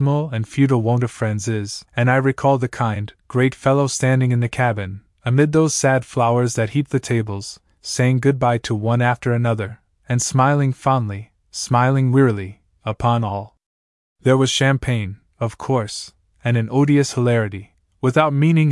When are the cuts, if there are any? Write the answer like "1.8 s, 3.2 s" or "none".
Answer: 1.9 s